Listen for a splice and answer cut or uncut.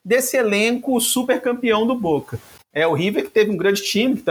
cut